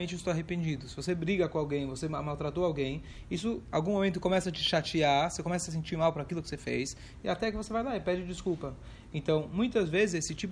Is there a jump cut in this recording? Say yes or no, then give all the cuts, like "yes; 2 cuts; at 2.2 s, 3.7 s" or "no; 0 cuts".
no; 0 cuts